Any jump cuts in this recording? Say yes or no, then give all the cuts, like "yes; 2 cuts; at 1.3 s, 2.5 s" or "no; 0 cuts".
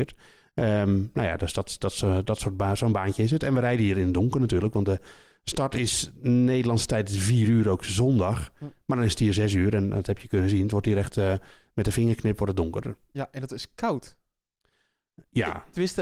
no; 0 cuts